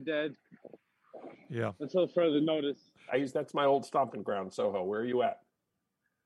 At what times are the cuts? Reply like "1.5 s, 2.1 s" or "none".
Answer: 3.1 s